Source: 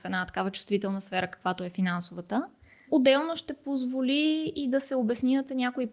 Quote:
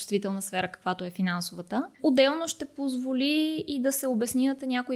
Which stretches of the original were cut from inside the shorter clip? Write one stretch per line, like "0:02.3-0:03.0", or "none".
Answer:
0:02.5-0:02.8

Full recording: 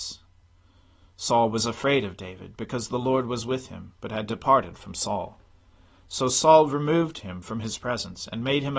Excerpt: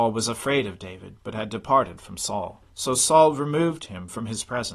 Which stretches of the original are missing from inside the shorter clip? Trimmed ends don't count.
0:02.6-0:04.0
0:05.4-0:06.0

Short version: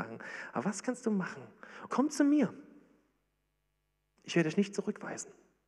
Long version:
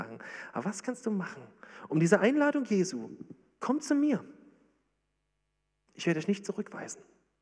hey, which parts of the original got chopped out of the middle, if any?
0:01.9-0:03.6

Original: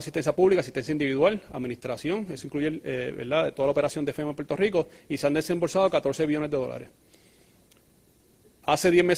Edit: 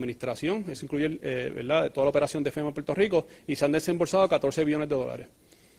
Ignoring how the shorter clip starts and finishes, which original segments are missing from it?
none

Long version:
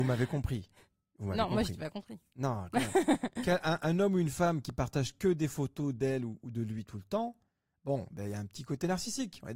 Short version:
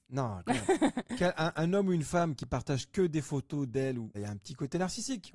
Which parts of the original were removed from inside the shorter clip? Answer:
0:06.4-0:08.2

